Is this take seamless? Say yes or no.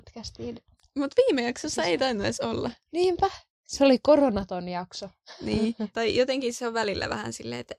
no